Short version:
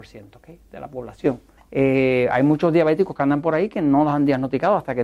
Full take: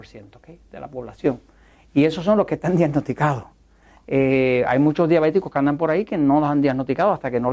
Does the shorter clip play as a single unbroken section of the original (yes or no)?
no